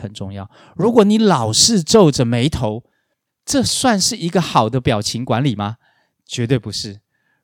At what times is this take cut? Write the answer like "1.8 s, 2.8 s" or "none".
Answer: 3.3 s